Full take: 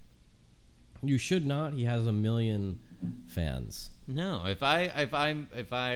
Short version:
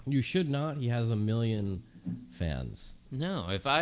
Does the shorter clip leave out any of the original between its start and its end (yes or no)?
no